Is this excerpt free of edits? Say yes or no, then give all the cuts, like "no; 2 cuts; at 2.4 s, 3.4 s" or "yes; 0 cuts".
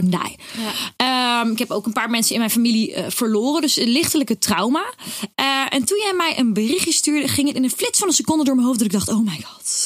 yes; 0 cuts